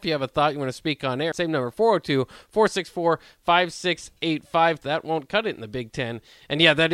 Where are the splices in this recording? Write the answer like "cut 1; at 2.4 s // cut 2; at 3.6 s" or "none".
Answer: cut 1; at 1.3 s // cut 2; at 4.8 s